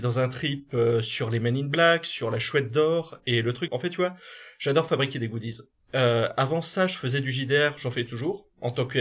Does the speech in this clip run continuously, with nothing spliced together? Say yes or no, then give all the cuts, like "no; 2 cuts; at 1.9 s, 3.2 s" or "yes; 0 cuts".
no; 1 cut; at 3.7 s